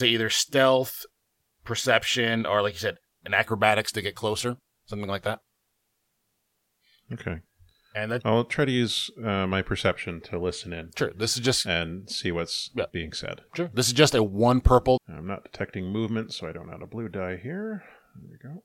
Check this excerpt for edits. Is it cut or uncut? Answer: cut